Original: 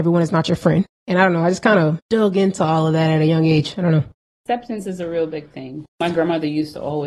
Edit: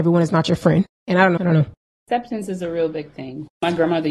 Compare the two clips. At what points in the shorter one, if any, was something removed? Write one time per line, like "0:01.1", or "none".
0:01.4